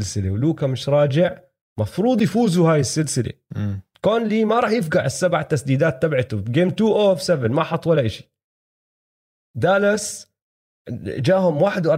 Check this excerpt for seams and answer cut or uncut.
uncut